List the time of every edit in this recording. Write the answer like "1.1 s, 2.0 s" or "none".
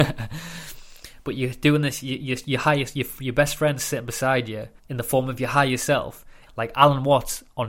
4.8 s, 6.5 s